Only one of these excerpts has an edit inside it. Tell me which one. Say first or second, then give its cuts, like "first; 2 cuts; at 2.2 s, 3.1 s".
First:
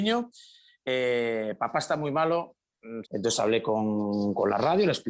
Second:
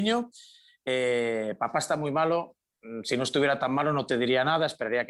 first; 1 cut; at 3.0 s